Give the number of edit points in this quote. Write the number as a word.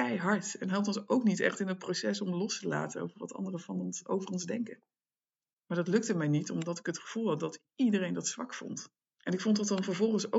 one